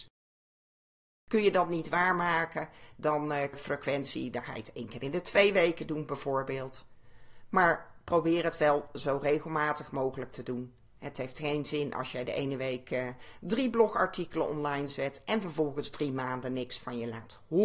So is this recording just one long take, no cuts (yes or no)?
no